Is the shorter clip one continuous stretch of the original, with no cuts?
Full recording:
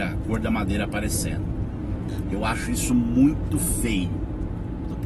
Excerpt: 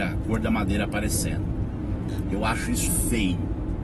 no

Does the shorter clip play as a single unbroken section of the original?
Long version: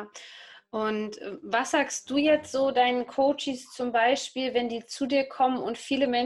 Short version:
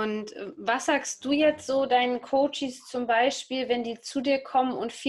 yes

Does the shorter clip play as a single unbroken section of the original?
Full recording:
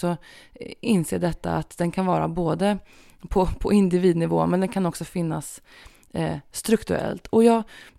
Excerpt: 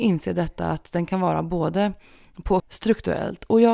no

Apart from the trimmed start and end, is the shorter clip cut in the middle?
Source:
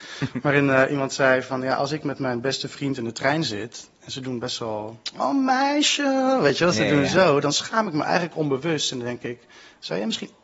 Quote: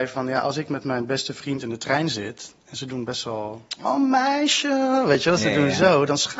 no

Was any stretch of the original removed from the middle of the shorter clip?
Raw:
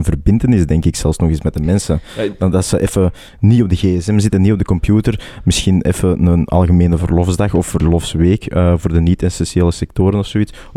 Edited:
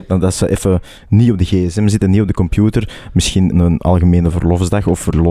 yes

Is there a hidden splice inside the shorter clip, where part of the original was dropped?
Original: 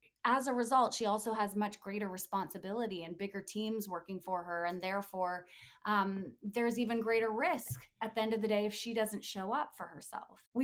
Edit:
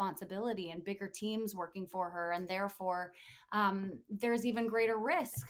no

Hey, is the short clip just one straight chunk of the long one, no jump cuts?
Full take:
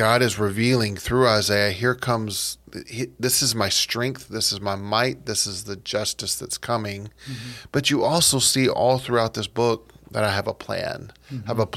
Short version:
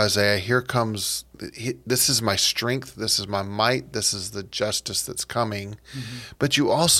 yes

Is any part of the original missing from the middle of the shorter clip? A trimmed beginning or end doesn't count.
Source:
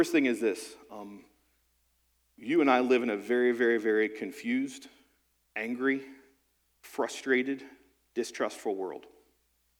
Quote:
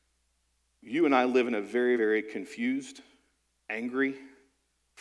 yes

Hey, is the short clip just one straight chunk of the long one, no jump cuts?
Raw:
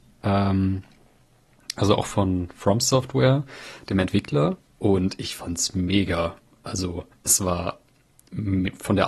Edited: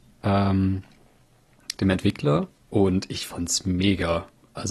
no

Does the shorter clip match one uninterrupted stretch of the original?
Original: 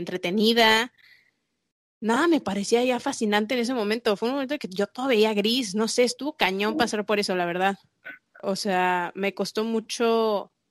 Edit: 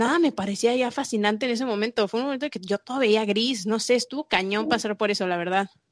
yes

